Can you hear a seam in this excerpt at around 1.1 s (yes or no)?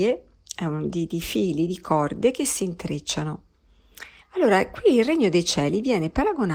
yes